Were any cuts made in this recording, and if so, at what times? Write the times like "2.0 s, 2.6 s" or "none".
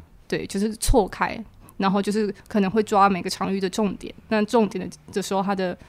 none